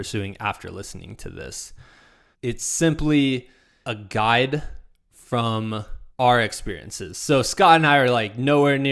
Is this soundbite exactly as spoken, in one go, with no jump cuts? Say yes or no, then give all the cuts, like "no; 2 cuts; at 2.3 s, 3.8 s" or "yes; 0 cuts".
no; 3 cuts; at 2.3 s, 3.8 s, 6.1 s